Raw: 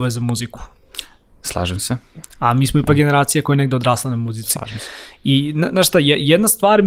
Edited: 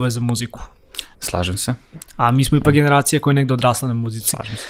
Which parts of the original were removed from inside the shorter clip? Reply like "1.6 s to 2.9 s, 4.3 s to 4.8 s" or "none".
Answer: 1.1 s to 1.3 s